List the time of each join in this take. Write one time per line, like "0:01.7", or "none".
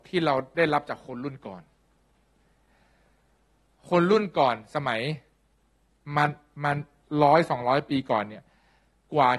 none